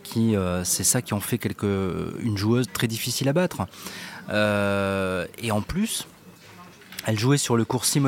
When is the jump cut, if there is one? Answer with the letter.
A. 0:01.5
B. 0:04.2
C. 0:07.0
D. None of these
D